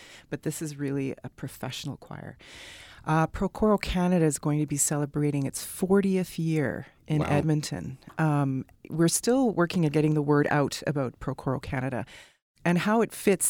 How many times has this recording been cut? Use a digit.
1